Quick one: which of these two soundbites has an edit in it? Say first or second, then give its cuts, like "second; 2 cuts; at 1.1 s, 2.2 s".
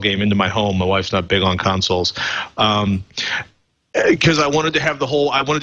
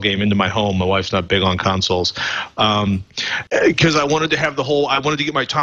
second; 1 cut; at 3.5 s